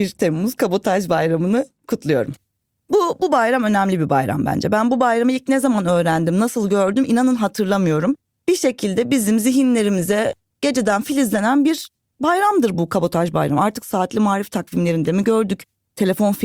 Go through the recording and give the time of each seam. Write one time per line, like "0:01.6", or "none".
none